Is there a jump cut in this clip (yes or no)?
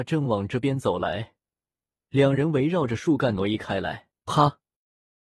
yes